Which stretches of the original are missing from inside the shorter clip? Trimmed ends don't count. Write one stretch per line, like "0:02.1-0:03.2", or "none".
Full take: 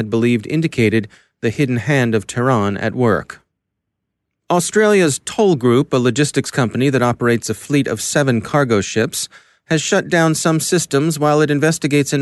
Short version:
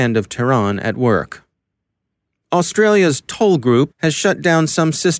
0:05.9-0:09.6